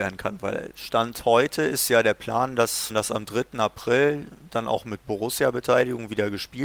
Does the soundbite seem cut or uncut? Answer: cut